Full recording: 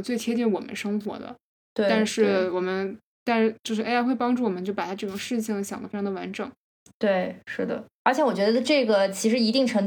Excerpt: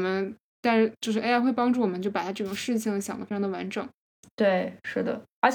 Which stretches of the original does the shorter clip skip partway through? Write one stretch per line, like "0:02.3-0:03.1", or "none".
none